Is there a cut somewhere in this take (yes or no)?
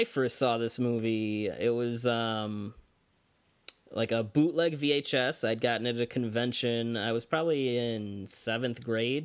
no